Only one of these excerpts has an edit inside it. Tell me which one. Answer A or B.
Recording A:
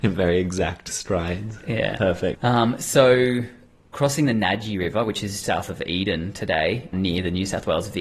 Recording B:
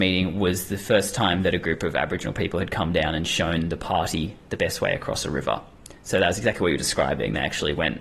A